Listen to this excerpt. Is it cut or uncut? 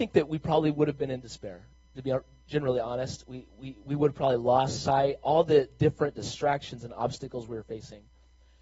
uncut